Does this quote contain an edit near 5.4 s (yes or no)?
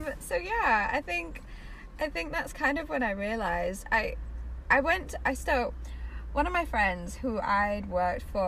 no